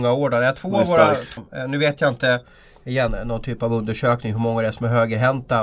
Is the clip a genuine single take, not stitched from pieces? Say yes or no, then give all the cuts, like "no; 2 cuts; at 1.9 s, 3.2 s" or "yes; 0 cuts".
no; 2 cuts; at 1.4 s, 3.1 s